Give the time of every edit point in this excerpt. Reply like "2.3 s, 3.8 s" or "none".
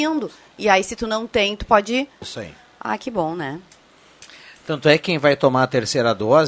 2.2 s